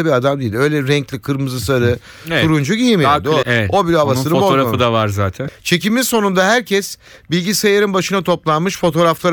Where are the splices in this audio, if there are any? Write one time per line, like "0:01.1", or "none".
0:03.4
0:05.5